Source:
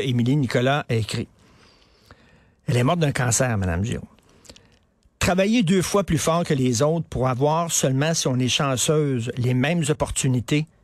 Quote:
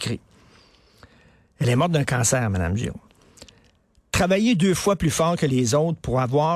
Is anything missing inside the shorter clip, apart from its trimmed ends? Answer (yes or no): no